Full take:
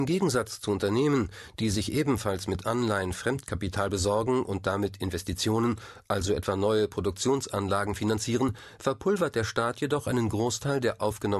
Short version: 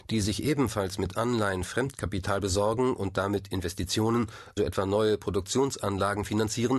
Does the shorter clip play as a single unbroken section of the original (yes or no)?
no